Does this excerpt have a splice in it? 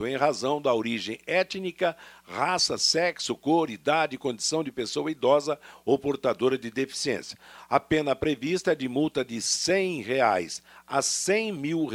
no; 0 cuts

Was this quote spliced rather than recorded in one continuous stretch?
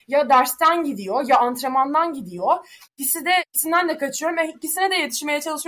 no; 0 cuts

